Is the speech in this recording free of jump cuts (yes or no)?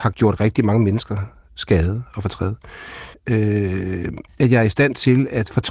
no